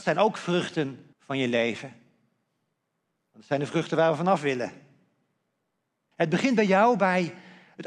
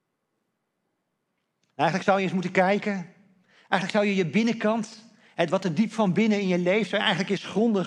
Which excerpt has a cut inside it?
first; 2 cuts; at 1.1 s, 6.1 s

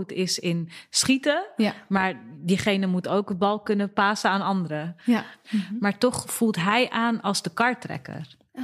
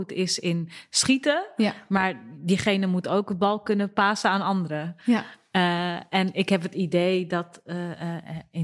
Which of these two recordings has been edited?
first; 1 cut; at 5.4 s

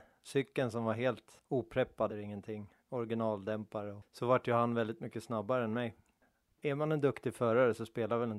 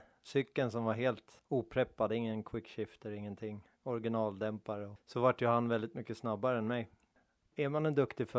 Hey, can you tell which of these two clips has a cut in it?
first; 1 cut; at 2.1 s

